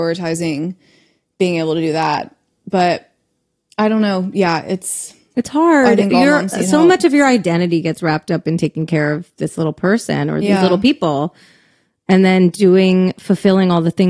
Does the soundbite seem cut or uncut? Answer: uncut